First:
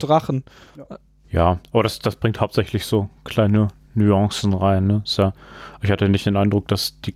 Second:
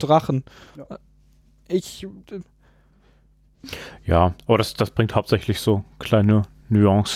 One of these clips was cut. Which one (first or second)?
first